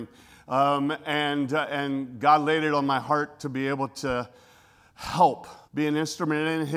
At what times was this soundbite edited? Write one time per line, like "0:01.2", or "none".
0:05.6